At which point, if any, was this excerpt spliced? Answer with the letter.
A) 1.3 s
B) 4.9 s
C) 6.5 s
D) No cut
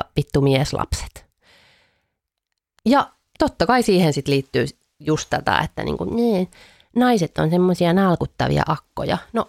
D